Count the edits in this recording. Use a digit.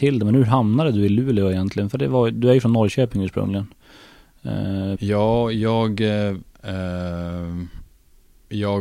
1